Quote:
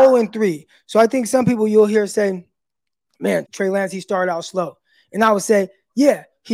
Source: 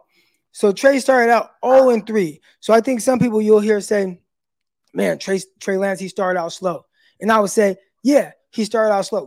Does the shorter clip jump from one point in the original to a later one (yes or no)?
yes